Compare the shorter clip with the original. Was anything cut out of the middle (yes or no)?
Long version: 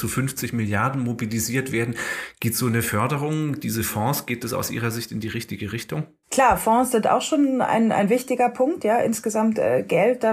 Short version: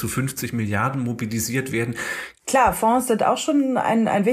yes